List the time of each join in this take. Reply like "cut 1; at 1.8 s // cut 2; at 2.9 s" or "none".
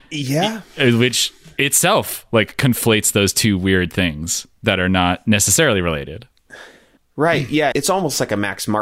cut 1; at 7.7 s